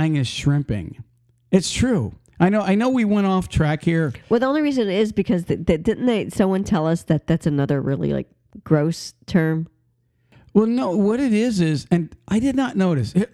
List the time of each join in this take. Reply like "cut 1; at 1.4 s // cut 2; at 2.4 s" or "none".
none